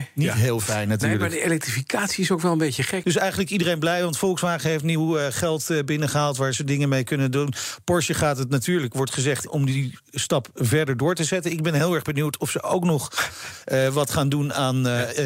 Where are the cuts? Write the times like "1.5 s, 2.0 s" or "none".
3.0 s, 9.5 s